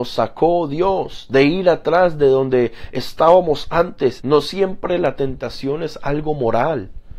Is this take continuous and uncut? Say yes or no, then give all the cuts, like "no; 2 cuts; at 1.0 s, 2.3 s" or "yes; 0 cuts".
no; 1 cut; at 4.2 s